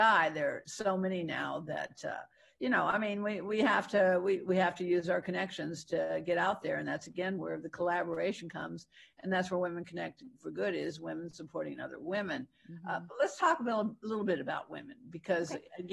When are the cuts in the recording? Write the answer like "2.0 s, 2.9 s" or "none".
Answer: none